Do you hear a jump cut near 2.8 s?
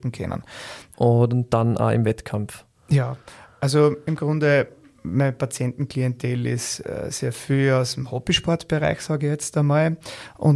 no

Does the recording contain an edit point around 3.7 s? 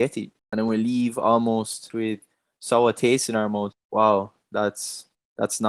yes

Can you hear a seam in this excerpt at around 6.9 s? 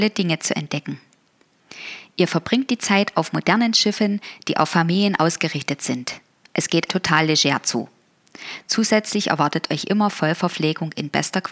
yes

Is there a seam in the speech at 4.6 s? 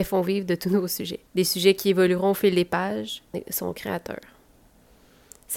no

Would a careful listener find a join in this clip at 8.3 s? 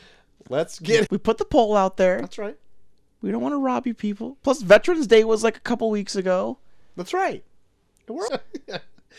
yes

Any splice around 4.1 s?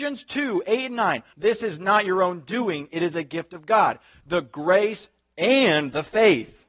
no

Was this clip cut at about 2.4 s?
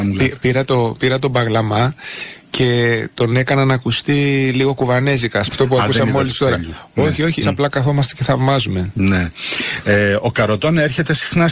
yes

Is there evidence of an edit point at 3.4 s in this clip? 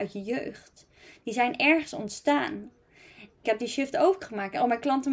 yes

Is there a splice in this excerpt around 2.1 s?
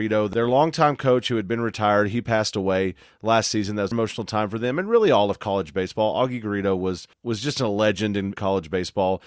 no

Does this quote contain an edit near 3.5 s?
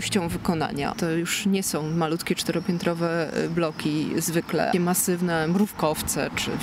no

